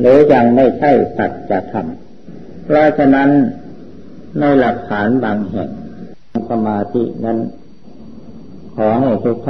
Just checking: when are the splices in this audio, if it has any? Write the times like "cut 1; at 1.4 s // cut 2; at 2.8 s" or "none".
none